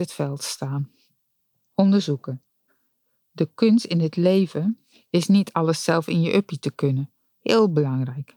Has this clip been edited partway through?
yes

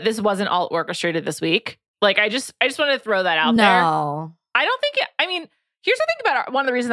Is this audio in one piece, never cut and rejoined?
yes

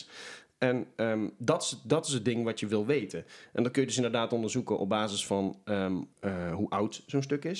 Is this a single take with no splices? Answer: no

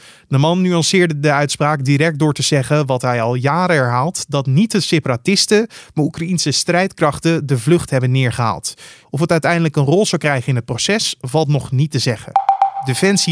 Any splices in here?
yes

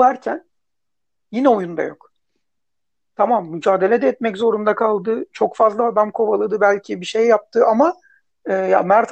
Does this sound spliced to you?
no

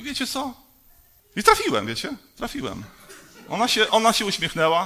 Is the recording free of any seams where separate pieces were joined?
no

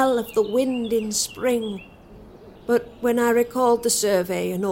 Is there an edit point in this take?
yes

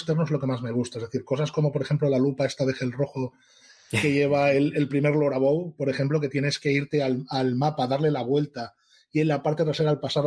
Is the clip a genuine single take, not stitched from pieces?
yes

